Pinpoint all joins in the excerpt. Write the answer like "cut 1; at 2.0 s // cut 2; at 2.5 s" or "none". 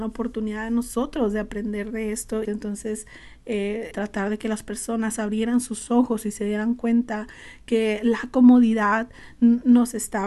cut 1; at 2.4 s // cut 2; at 3.9 s